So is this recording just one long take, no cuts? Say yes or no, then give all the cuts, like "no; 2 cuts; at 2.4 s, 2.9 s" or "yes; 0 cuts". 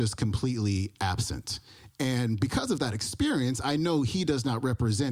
yes; 0 cuts